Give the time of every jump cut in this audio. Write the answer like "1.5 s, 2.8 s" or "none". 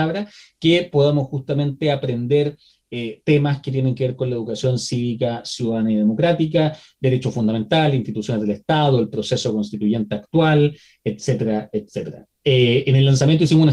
none